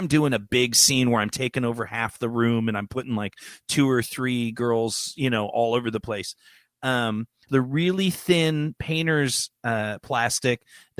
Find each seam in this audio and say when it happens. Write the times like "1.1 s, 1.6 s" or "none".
7.5 s